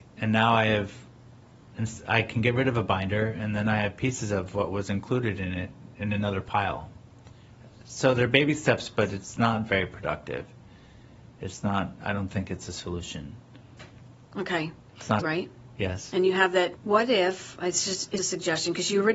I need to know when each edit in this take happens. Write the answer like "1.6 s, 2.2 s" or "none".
15.2 s, 16.8 s, 18.2 s